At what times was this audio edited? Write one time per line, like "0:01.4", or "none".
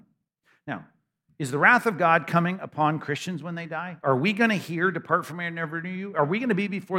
none